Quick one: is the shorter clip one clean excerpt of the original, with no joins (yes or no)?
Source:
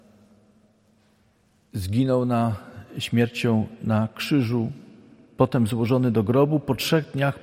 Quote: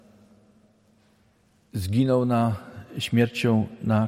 yes